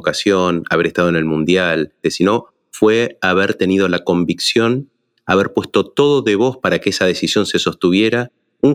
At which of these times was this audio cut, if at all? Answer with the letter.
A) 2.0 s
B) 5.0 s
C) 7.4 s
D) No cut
A